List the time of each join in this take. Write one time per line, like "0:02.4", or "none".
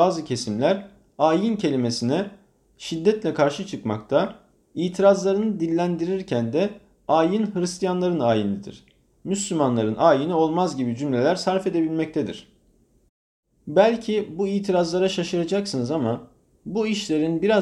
none